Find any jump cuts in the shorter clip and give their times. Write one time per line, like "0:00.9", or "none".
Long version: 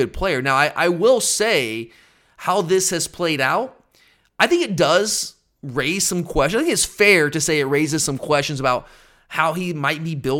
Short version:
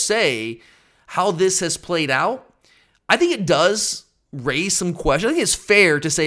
none